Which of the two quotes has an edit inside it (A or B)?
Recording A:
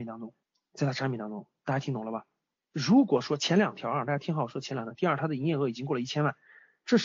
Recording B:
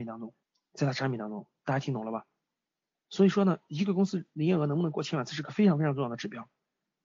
A